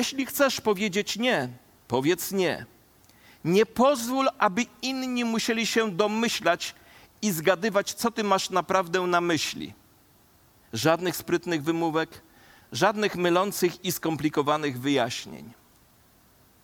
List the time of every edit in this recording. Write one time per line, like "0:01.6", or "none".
0:10.6